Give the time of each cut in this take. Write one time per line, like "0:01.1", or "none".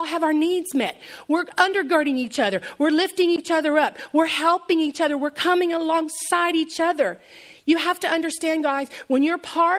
none